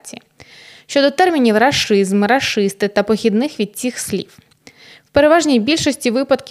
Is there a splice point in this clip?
no; 0 cuts

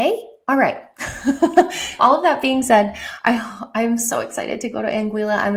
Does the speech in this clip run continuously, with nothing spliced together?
no; 1 cut; at 2.0 s

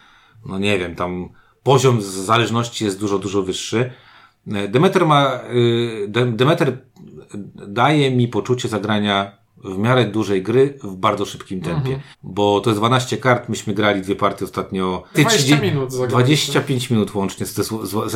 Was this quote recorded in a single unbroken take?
no; 2 cuts; at 12.1 s, 15.1 s

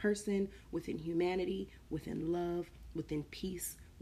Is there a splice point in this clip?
no; 0 cuts

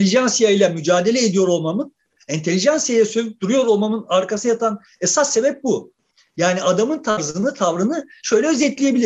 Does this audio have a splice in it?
no; 0 cuts

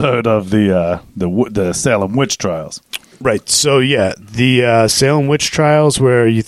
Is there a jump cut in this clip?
no; 0 cuts

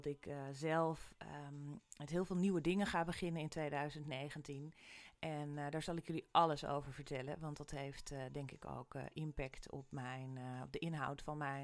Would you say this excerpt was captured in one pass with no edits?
yes; 0 cuts

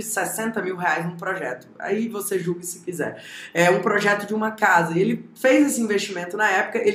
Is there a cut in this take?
no; 0 cuts

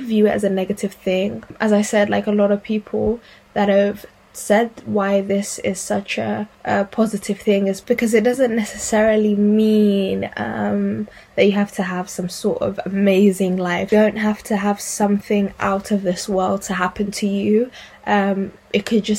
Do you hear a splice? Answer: yes; 1 cut; at 6.5 s

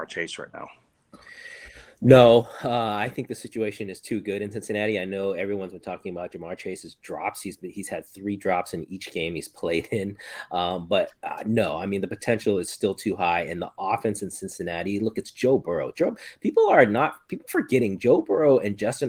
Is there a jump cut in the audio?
no; 0 cuts

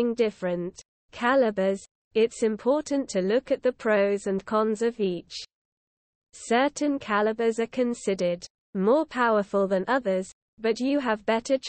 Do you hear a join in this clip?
no; 0 cuts

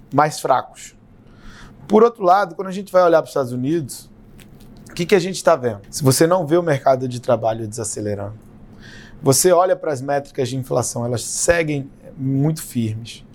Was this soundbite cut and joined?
yes; 1 cut; at 5.8 s

